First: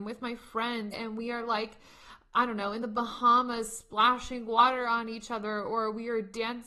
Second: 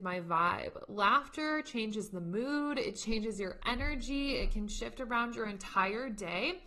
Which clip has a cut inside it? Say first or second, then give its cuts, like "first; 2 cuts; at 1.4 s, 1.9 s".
first; 1 cut; at 0.9 s